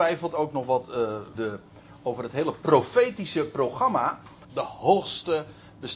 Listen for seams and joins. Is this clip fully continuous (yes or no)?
no